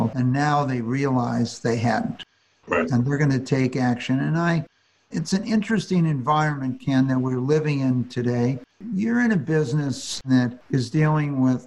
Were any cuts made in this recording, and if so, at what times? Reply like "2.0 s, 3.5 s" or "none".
none